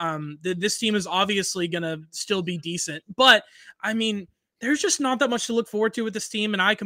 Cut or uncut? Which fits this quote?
uncut